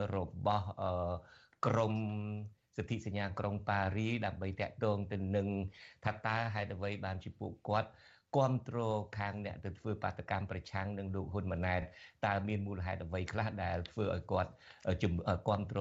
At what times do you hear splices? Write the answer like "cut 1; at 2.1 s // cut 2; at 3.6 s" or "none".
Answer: none